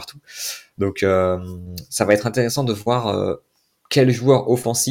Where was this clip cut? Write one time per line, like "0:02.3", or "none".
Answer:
none